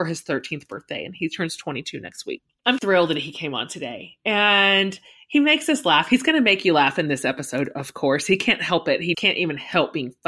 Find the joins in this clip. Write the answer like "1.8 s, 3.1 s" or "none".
2.8 s, 9.1 s